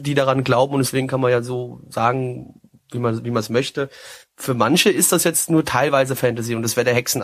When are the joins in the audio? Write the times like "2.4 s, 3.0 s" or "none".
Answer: none